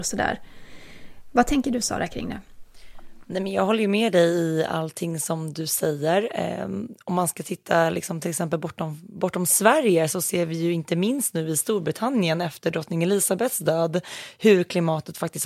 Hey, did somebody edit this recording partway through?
yes; 1 cut; at 1.2 s

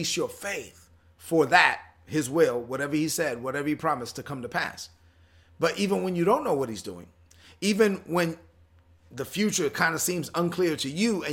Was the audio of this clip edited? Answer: no; 0 cuts

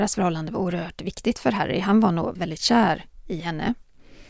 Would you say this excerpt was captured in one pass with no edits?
no; 1 cut; at 2.3 s

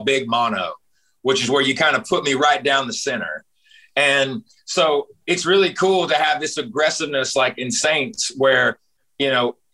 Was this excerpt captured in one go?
yes; 0 cuts

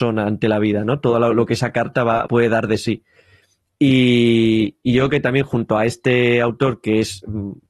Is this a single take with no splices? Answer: no; 1 cut; at 2.3 s

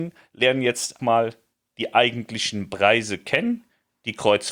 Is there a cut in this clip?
yes; 1 cut; at 1.0 s

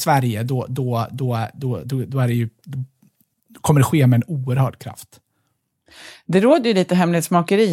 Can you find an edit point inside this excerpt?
no; 0 cuts

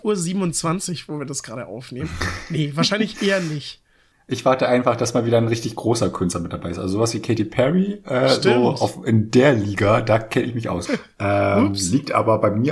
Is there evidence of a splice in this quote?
yes; 1 cut; at 10.9 s

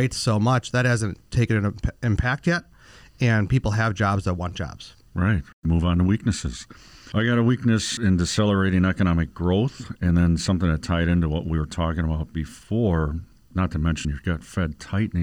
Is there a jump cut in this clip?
no; 0 cuts

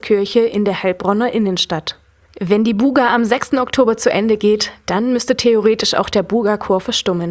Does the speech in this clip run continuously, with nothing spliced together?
yes; 0 cuts

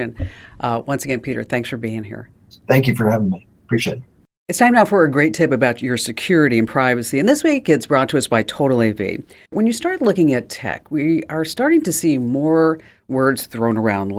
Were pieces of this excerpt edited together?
no; 0 cuts

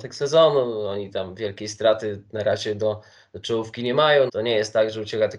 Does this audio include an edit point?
yes; 1 cut; at 4.3 s

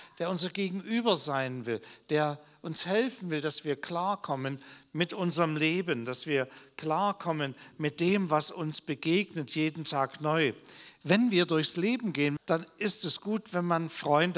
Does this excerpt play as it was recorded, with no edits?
no; 2 cuts; at 11.0 s, 12.4 s

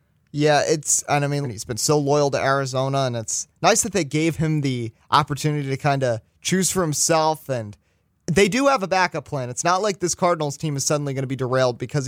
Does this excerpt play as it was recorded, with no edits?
no; 1 cut; at 1.4 s

